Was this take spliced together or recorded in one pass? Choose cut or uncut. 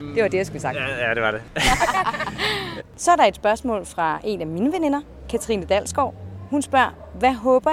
cut